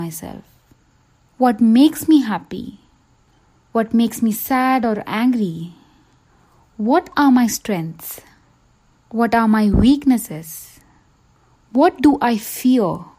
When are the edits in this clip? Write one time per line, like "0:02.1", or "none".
none